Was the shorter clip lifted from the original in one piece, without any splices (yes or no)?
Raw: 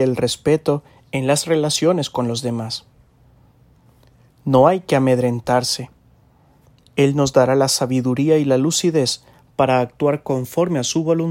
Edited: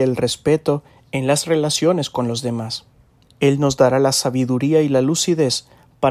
no